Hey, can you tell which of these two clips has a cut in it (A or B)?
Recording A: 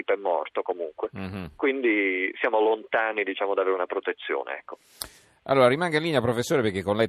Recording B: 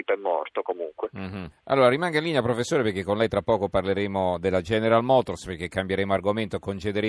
B